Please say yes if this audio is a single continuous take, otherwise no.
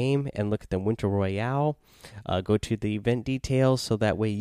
yes